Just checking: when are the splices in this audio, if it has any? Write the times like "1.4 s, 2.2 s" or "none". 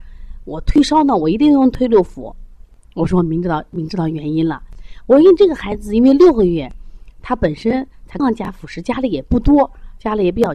8.2 s

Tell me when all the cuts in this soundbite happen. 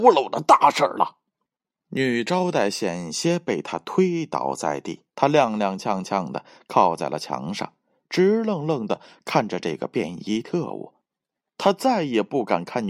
5.1 s

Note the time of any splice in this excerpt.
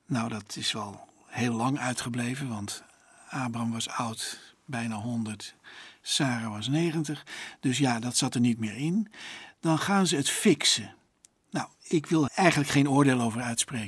12.3 s

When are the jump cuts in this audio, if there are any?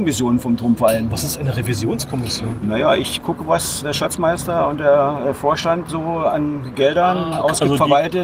3.8 s

